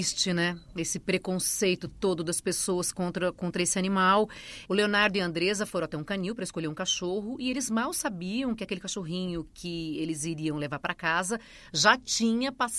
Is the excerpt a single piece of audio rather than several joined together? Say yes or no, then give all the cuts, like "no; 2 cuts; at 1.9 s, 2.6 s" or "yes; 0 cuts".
no; 1 cut; at 4.7 s